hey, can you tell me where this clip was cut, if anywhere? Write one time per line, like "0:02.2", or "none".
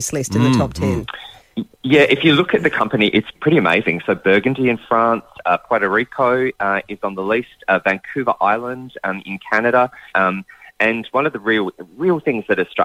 0:03.3
0:10.1

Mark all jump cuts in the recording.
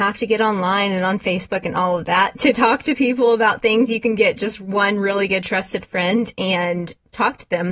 none

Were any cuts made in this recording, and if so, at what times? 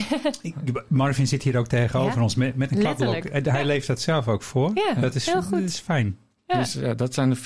none

